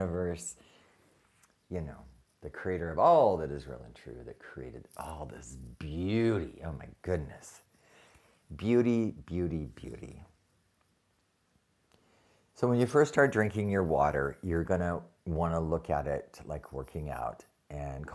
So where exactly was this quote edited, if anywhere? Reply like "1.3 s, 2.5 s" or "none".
none